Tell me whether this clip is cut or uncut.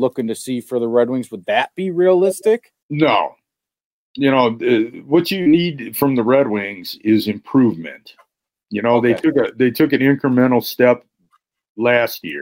cut